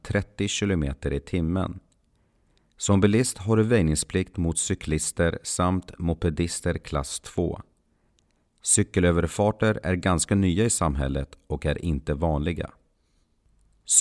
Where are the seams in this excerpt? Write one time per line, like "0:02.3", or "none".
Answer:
none

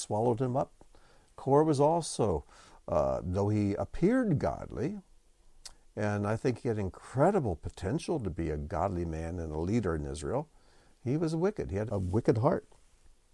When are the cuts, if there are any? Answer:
0:11.9

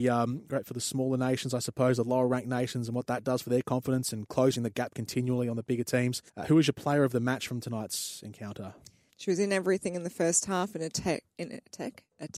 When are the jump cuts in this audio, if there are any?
0:06.3
0:09.1

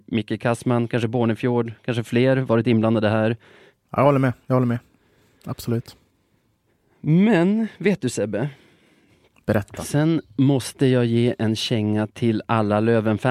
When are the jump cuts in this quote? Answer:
0:03.7

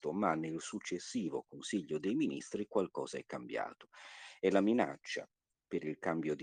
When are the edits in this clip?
none

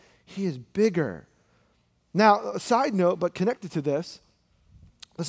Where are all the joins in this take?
none

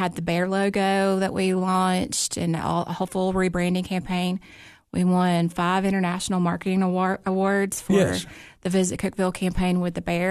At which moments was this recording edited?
none

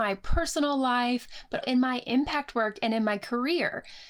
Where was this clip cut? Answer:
0:01.6

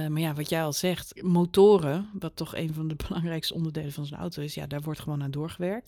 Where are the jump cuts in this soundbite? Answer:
0:01.2

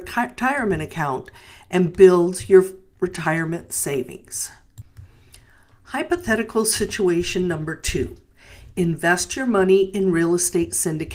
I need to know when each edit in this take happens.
none

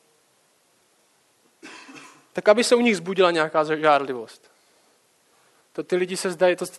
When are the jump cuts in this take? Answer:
0:05.5

